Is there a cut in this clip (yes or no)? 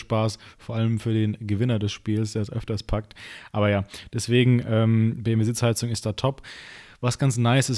no